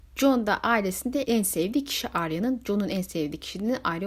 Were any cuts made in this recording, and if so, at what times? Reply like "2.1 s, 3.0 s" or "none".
1.2 s